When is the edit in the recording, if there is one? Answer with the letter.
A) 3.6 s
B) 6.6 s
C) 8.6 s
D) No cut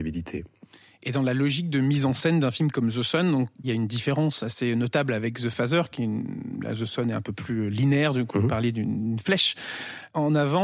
A